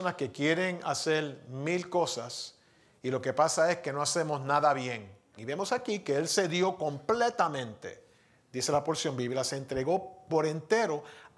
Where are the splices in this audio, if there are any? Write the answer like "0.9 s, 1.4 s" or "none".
5.4 s